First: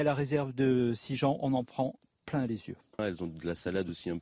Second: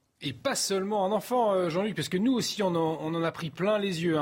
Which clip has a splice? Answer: first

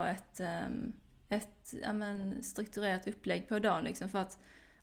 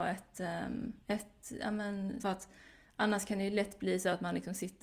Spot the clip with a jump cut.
second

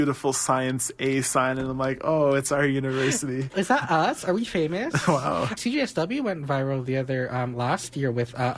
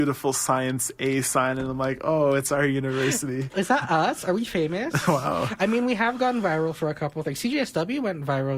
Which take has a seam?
first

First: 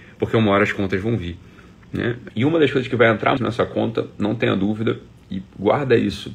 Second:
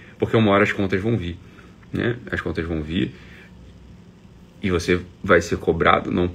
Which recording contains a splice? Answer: first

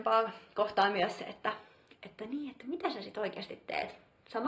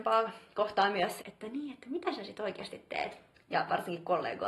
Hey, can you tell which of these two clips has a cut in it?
second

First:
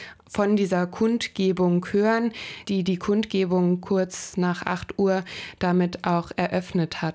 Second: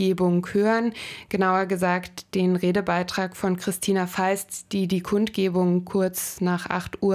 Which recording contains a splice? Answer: first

